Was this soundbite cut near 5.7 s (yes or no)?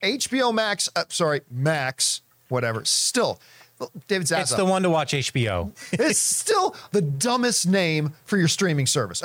yes